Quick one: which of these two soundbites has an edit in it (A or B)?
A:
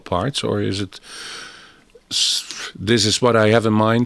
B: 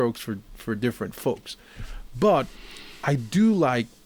A